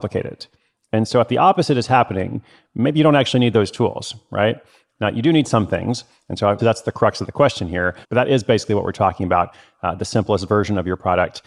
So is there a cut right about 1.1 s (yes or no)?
no